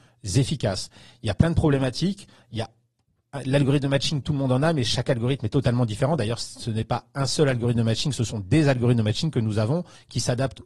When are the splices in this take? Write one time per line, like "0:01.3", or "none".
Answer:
none